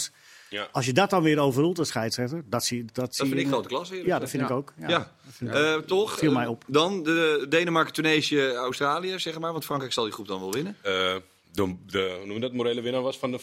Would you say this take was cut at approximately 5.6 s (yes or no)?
no